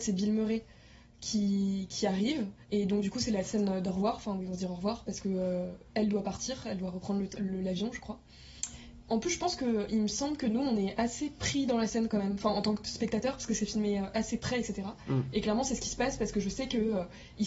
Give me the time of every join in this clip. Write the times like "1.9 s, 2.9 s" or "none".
2.6 s, 9.0 s, 15.3 s